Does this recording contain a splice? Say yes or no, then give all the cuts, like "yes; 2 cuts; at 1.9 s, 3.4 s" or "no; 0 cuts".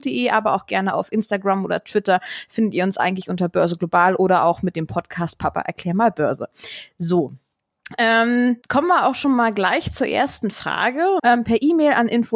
yes; 2 cuts; at 8.6 s, 11.2 s